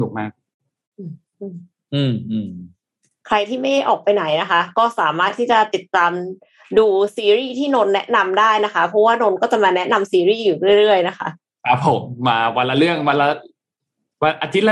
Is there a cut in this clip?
no; 0 cuts

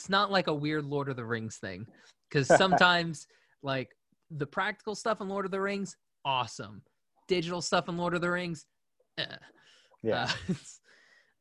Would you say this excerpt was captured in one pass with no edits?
yes; 0 cuts

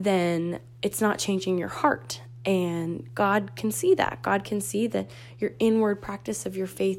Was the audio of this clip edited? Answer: no; 0 cuts

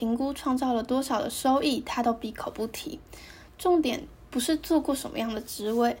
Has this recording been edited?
no; 0 cuts

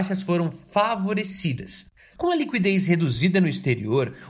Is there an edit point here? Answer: yes; 1 cut; at 2.1 s

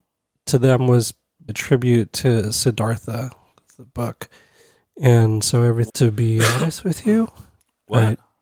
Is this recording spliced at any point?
yes; 2 cuts; at 1.5 s, 5.9 s

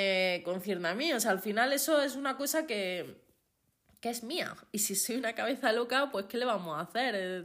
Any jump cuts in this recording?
no; 0 cuts

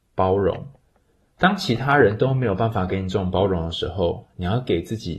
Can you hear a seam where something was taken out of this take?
no; 0 cuts

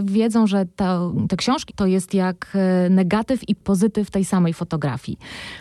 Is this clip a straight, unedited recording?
no; 1 cut; at 1.7 s

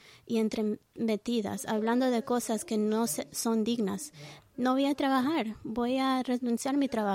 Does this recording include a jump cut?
yes; 1 cut; at 4.4 s

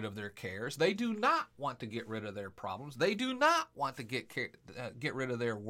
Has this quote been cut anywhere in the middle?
no; 0 cuts

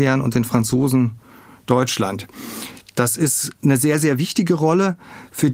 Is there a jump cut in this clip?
no; 0 cuts

